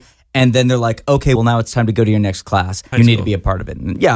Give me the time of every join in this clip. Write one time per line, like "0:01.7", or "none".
0:01.4
0:02.9